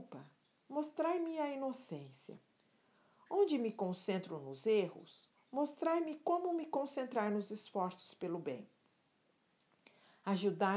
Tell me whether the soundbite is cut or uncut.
uncut